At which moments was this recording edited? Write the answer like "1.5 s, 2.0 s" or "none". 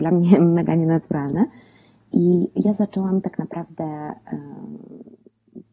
none